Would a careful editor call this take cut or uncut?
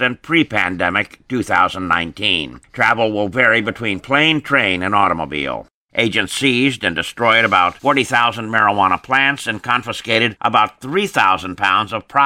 cut